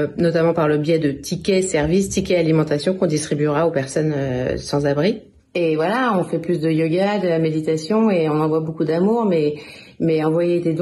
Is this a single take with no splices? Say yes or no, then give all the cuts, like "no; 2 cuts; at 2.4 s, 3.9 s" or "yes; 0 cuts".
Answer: no; 1 cut; at 5.4 s